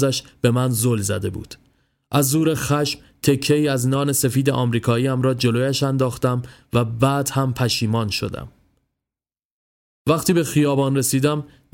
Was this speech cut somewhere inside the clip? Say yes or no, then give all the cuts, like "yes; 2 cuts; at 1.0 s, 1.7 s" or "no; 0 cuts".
no; 0 cuts